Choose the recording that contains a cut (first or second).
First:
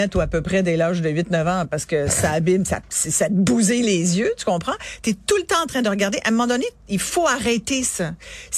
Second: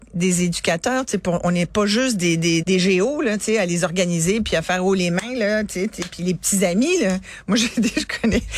second